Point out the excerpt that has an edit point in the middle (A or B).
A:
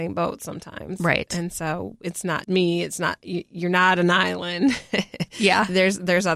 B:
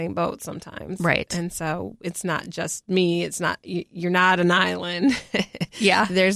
A